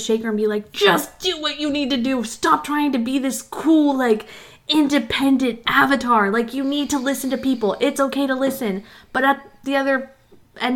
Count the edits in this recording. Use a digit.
0